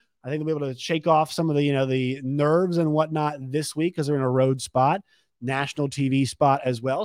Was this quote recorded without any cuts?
yes; 0 cuts

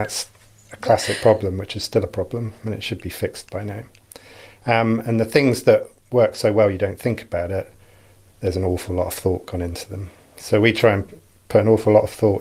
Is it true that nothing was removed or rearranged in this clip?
yes; 0 cuts

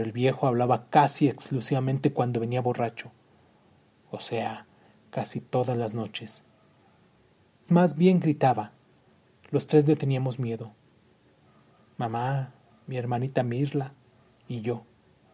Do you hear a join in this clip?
yes; 1 cut; at 7.7 s

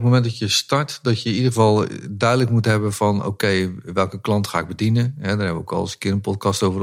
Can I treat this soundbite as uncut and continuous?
yes; 0 cuts

